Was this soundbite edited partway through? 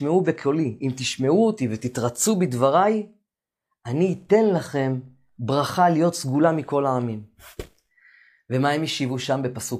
no; 0 cuts

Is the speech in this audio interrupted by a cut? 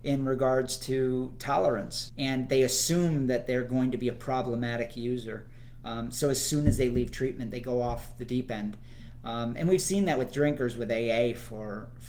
yes; 2 cuts; at 2.1 s, 5.8 s

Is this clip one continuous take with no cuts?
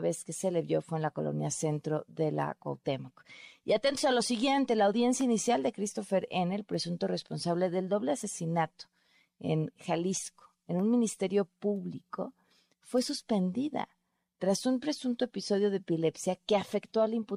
yes; 0 cuts

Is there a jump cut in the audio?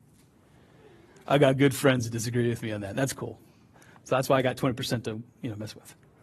no; 0 cuts

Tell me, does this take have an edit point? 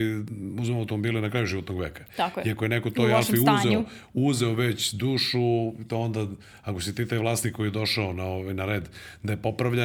no; 0 cuts

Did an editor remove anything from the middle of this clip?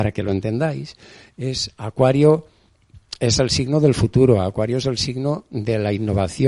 no; 0 cuts

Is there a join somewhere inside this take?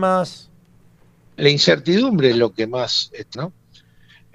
yes; 2 cuts; at 1.4 s, 3.3 s

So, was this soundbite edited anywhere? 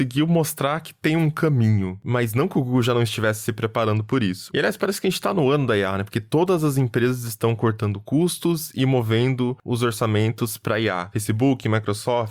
no; 0 cuts

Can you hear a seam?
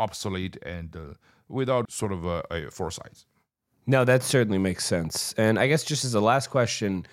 yes; 1 cut; at 1.8 s

